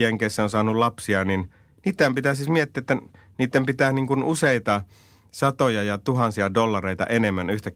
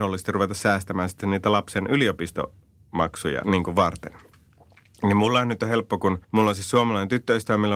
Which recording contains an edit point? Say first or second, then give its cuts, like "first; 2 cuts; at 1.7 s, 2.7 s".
second; 2 cuts; at 3.4 s, 6.2 s